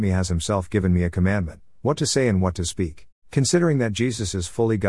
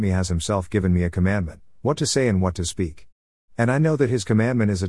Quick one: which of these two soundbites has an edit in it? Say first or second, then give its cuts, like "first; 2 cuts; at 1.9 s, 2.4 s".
first; 1 cut; at 3.2 s